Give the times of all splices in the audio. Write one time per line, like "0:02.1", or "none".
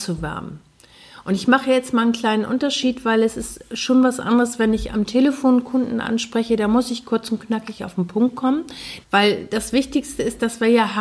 0:09.0